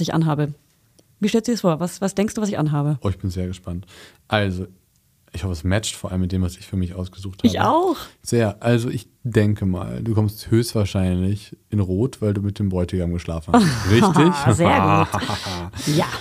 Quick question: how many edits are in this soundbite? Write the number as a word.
zero